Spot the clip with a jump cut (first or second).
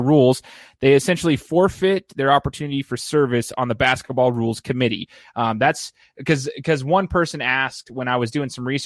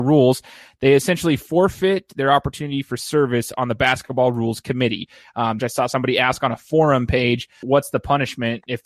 second